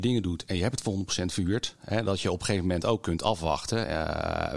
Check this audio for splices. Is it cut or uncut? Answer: uncut